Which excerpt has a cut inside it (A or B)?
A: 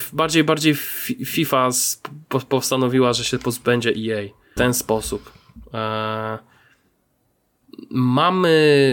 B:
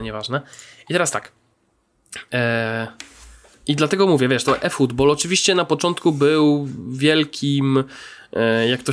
A